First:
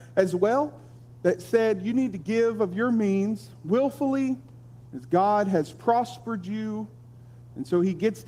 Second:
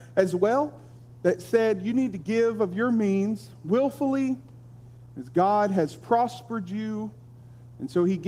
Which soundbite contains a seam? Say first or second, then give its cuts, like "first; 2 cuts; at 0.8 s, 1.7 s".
first; 1 cut; at 4.9 s